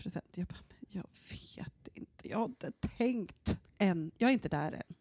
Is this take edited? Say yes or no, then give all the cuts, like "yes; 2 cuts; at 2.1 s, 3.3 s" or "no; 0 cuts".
yes; 1 cut; at 3.7 s